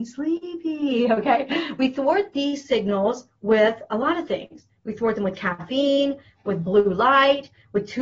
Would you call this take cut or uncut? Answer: uncut